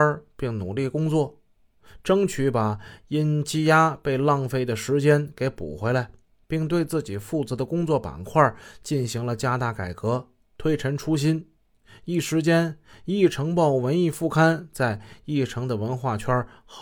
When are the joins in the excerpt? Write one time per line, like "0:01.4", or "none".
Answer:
none